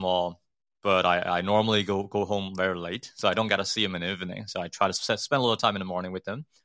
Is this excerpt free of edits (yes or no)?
yes